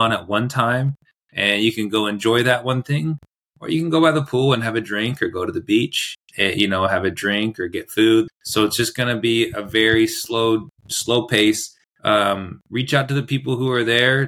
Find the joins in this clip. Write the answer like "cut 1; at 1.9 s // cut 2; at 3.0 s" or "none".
cut 1; at 8.3 s // cut 2; at 11.8 s